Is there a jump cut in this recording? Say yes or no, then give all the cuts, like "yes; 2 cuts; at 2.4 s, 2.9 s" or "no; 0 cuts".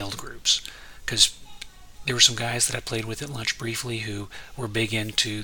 no; 0 cuts